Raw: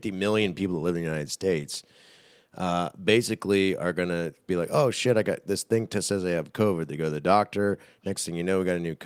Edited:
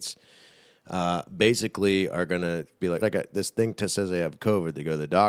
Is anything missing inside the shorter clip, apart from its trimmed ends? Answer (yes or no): yes